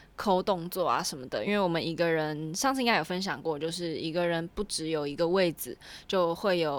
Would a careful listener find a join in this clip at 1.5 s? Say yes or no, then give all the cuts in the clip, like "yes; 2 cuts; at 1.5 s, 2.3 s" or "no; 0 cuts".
no; 0 cuts